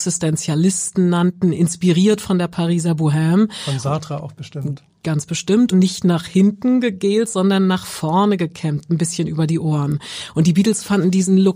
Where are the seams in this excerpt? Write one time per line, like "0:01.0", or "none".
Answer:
0:05.7